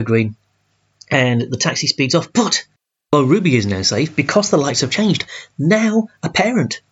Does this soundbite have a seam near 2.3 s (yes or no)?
no